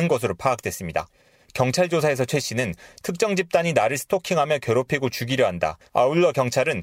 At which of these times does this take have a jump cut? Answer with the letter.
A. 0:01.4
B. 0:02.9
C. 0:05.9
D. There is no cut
C